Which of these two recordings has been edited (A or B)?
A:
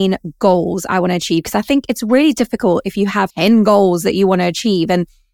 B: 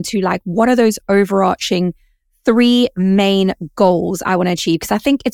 A